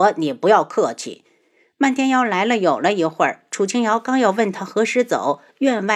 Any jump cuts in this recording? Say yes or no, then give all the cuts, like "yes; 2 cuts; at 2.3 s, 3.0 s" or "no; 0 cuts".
no; 0 cuts